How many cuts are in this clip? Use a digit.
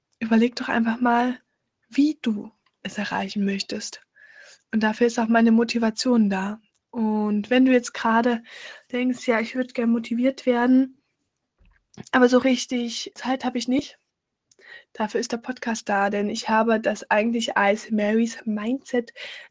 1